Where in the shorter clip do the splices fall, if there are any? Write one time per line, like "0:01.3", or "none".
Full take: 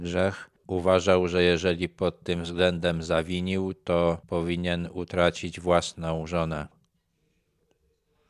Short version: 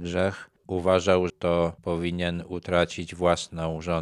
0:01.3